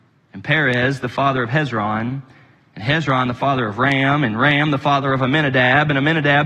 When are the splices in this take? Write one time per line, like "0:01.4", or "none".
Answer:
none